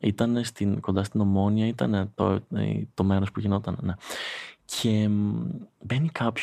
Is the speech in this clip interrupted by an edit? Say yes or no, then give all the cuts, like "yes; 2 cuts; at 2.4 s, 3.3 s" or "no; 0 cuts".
no; 0 cuts